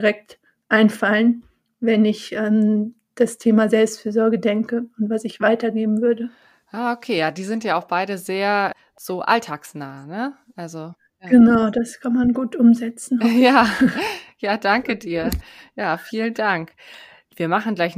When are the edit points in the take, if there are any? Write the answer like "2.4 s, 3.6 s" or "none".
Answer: none